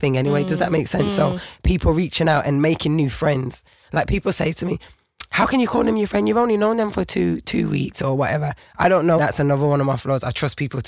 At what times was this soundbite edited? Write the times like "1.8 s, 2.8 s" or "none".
9.2 s